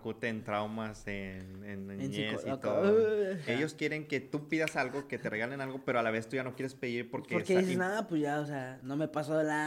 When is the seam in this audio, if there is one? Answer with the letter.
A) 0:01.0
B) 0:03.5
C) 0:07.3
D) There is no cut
B